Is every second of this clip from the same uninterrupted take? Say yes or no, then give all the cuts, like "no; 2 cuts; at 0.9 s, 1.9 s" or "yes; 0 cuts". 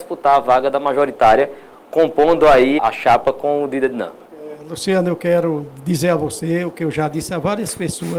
no; 2 cuts; at 2.8 s, 4.2 s